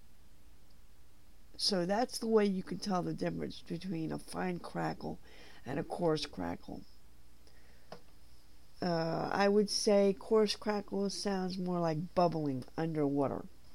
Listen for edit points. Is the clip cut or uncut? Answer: uncut